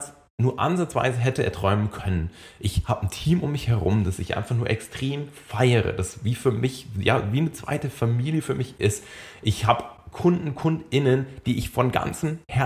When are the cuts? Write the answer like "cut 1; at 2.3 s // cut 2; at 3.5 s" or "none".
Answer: none